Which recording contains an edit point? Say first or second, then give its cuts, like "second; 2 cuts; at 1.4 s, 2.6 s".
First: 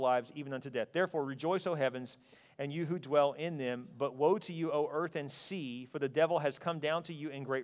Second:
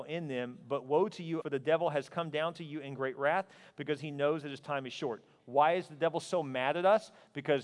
second; 1 cut; at 1.4 s